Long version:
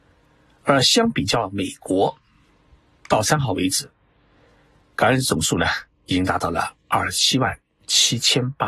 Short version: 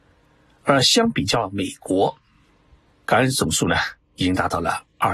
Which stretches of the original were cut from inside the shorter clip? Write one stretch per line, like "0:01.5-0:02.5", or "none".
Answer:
0:02.9-0:04.8